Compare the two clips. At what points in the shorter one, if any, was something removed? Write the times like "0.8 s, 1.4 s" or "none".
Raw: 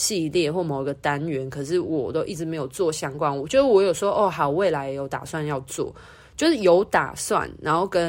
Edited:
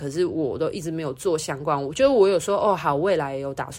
none